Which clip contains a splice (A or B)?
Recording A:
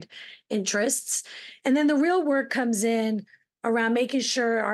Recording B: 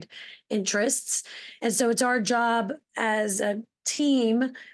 A